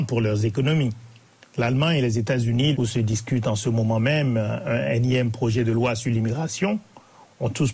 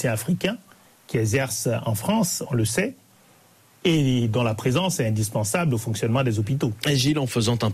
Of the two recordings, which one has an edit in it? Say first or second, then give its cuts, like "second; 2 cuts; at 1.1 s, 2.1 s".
first; 1 cut; at 2.7 s